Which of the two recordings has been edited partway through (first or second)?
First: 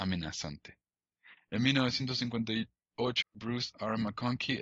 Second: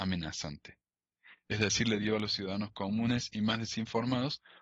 first